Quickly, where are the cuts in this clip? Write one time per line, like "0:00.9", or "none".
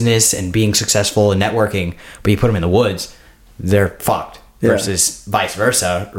none